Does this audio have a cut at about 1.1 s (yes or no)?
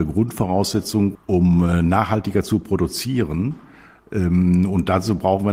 yes